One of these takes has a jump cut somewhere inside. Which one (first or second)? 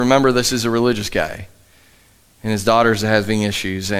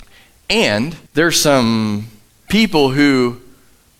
second